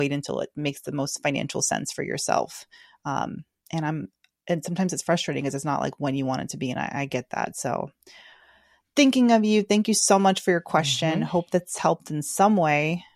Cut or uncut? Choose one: uncut